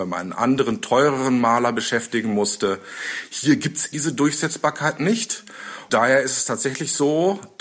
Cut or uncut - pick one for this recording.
cut